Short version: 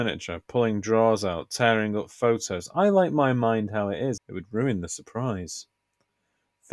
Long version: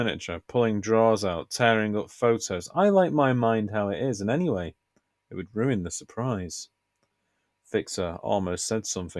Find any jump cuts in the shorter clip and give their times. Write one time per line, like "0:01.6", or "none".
0:04.2